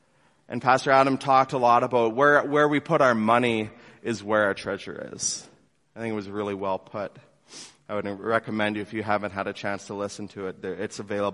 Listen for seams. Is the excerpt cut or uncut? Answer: uncut